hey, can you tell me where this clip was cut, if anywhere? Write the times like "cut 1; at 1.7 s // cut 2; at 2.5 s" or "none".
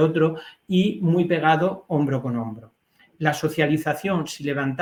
none